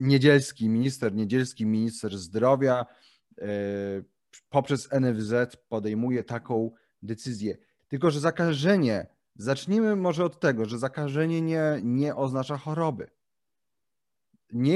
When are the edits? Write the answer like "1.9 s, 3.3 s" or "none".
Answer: 7.8 s